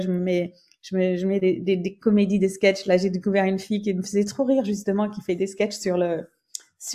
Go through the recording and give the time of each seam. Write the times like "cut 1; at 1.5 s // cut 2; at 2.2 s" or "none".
none